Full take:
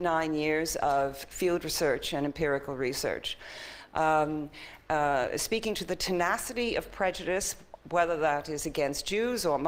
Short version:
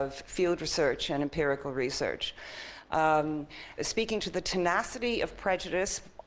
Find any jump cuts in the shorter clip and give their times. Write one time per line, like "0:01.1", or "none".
0:03.8